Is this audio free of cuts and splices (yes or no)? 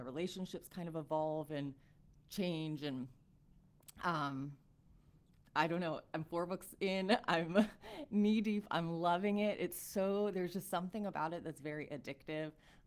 yes